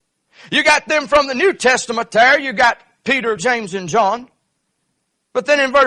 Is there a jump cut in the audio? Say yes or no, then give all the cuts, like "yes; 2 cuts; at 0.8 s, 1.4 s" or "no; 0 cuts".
no; 0 cuts